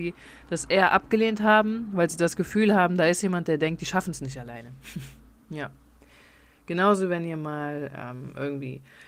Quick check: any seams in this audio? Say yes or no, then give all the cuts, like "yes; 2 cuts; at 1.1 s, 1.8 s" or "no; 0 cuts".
no; 0 cuts